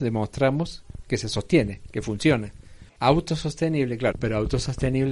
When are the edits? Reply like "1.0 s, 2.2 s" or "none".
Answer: 3.0 s, 4.1 s